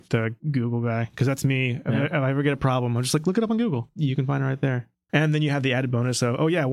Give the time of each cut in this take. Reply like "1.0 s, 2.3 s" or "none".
5.1 s